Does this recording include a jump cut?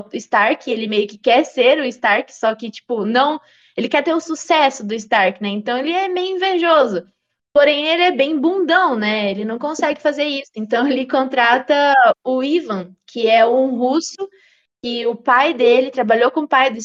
no; 0 cuts

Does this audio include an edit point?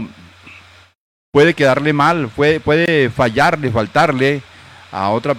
no; 0 cuts

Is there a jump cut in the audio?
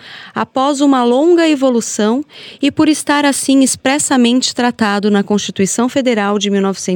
no; 0 cuts

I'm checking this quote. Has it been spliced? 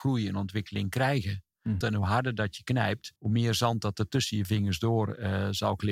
yes; 2 cuts; at 1.8 s, 3.2 s

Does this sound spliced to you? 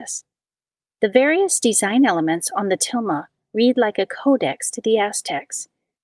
no; 0 cuts

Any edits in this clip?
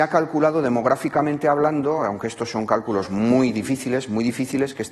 no; 0 cuts

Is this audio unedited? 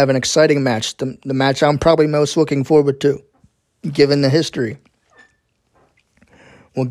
yes; 0 cuts

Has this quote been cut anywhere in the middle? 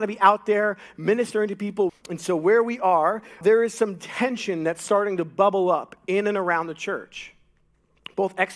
yes; 2 cuts; at 1.9 s, 3.4 s

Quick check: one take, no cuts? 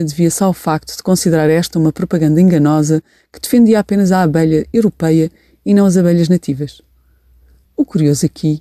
no; 1 cut; at 7.6 s

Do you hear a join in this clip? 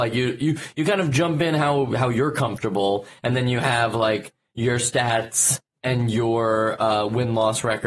no; 0 cuts

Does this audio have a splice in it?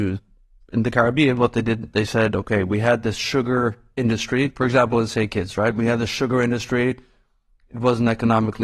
no; 0 cuts

